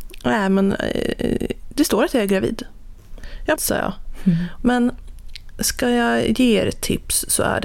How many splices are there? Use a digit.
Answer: 2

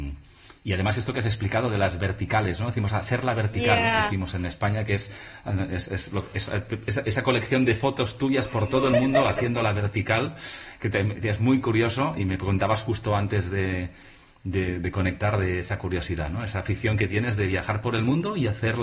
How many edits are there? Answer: 0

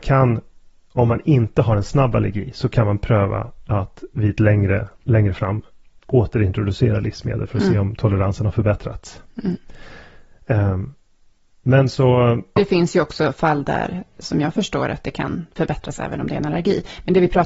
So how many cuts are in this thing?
1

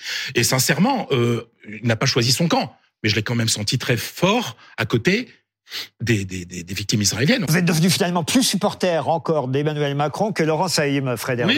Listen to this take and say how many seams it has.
1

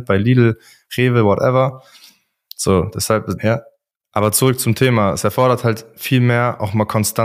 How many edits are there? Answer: 1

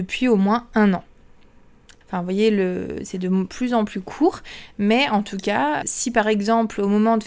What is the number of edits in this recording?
2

